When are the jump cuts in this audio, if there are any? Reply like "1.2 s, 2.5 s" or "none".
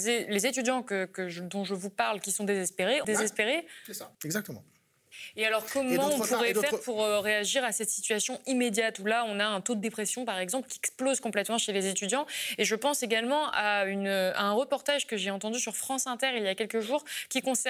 3.0 s, 4.1 s